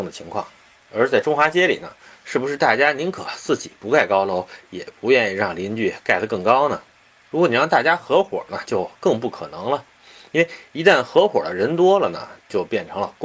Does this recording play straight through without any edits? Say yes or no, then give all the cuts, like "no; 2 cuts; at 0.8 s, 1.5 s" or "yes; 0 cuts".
yes; 0 cuts